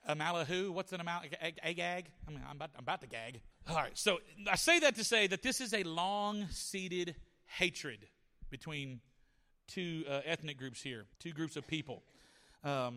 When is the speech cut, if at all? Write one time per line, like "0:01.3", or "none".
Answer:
0:03.5
0:11.1

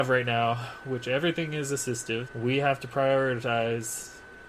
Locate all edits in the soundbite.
0:02.3

